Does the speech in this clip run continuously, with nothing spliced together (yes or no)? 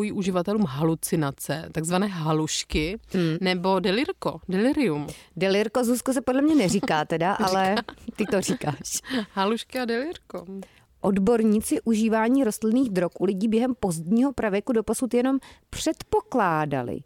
yes